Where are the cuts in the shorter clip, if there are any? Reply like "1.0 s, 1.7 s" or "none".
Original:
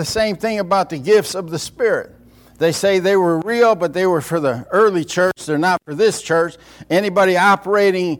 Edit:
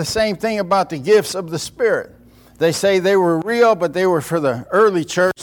none